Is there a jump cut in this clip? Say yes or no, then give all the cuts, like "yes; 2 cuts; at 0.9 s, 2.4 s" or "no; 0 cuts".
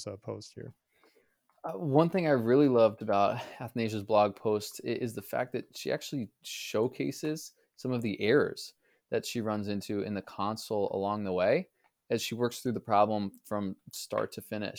no; 0 cuts